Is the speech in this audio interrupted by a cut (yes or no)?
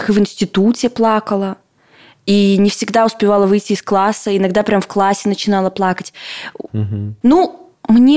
yes